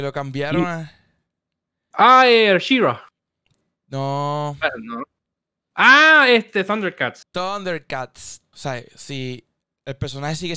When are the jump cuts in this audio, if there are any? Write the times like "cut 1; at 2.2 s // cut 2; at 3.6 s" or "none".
cut 1; at 8.5 s